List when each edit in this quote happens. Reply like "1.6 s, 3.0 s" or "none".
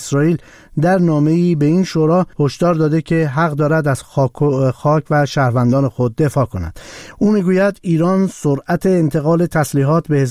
2.3 s